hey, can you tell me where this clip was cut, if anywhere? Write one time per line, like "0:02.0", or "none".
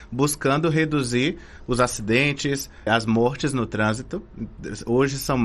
0:02.9